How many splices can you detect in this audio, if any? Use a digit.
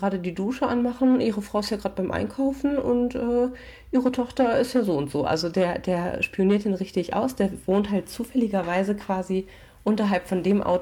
0